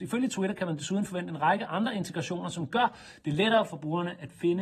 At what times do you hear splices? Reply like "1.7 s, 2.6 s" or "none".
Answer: none